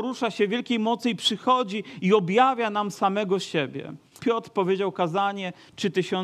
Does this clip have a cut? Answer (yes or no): yes